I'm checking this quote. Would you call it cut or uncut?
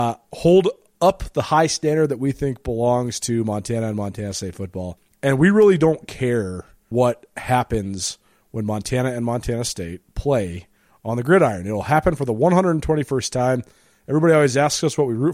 uncut